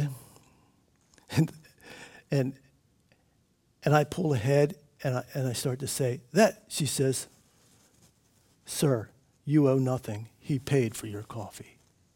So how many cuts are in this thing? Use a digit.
0